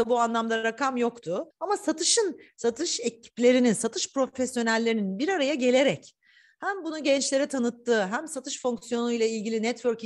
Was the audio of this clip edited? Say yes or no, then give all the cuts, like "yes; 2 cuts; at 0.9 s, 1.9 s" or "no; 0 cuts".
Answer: yes; 1 cut; at 1.5 s